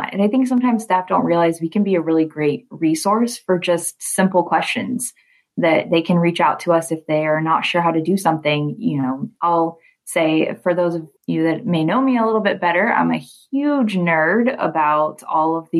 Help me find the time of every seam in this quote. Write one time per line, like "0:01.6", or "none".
0:09.4
0:11.2